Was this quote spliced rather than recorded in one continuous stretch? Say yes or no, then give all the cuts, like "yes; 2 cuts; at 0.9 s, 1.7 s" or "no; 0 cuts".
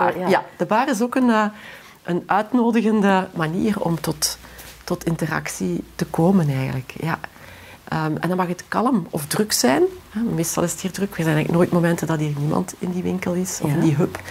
no; 0 cuts